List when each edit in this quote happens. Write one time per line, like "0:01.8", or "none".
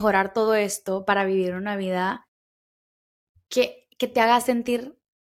none